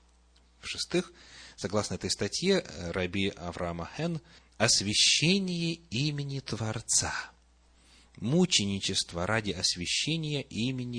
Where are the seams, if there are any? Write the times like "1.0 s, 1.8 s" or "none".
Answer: 4.4 s